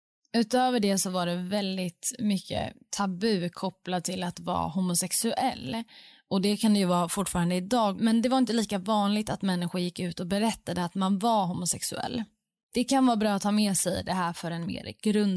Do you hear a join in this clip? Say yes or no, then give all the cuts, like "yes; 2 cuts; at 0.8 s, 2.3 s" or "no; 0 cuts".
yes; 1 cut; at 8.0 s